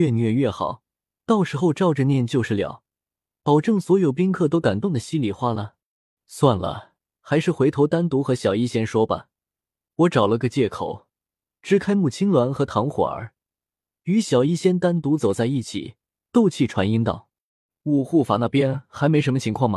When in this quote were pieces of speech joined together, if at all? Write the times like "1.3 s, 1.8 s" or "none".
6.2 s, 9.9 s